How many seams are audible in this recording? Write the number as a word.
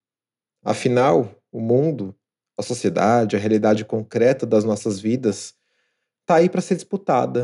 zero